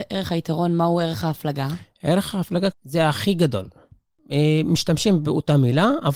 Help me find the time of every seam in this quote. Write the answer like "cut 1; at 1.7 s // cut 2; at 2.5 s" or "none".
cut 1; at 2.7 s